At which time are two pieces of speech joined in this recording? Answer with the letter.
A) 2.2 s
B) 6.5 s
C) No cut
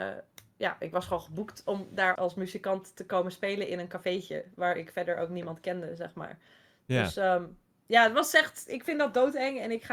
A